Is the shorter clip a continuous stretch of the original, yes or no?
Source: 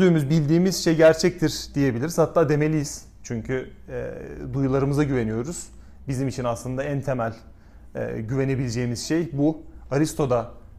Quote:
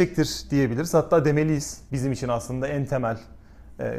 no